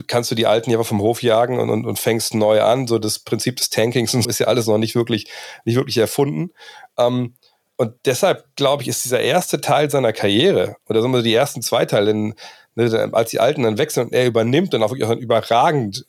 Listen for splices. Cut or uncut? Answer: cut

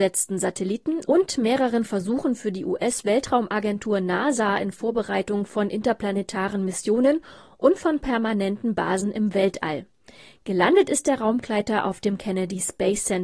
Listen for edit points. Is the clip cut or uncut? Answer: uncut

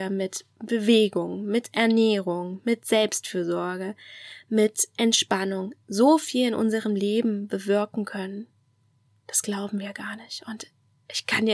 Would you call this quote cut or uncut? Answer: uncut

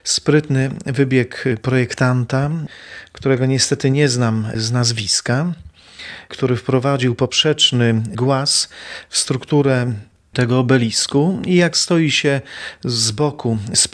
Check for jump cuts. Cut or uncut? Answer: uncut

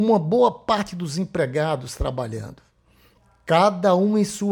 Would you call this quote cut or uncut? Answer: uncut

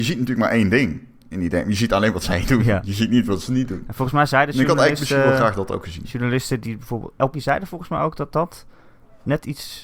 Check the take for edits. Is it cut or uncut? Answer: cut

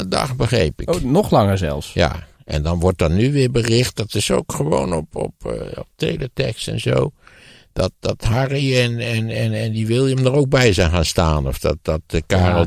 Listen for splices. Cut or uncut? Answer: uncut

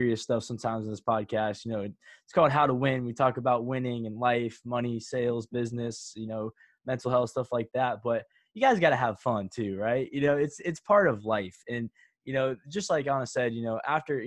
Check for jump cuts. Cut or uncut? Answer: uncut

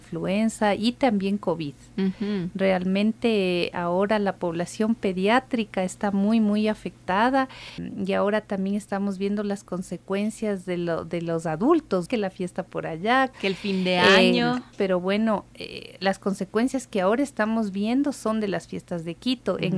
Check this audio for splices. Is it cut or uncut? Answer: uncut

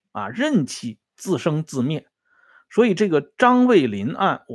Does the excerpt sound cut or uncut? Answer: uncut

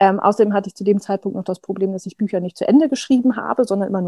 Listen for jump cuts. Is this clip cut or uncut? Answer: uncut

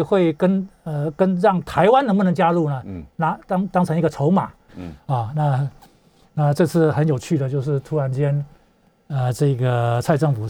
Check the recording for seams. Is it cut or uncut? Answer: cut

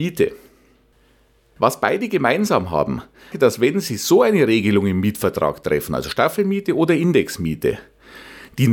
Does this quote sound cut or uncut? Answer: cut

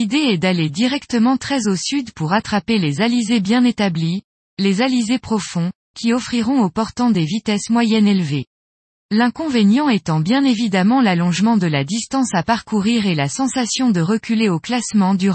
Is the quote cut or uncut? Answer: uncut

